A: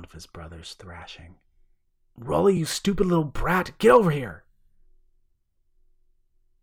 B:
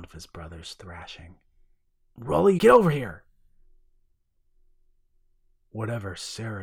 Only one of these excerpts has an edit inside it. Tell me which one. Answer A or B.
B